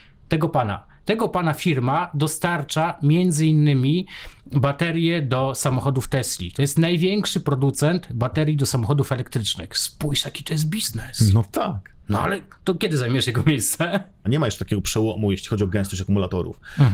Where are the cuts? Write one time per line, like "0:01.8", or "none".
0:12.0
0:14.2

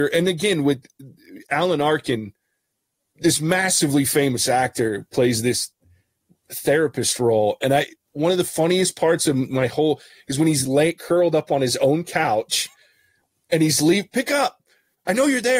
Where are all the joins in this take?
none

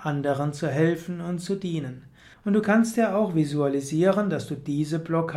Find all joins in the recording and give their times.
0:02.3

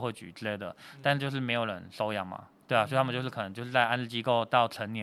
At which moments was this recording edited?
none

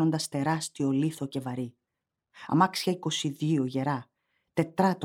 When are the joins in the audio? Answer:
none

